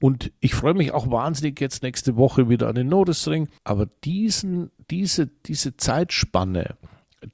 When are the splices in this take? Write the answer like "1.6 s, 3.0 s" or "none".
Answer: 3.6 s